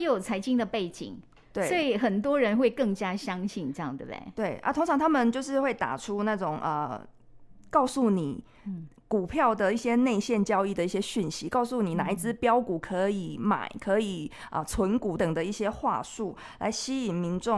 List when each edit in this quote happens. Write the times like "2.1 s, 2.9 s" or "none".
15.2 s